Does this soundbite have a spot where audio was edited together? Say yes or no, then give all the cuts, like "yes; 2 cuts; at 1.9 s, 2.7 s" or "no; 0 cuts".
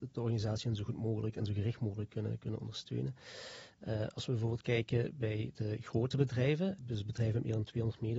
yes; 2 cuts; at 3.7 s, 6.8 s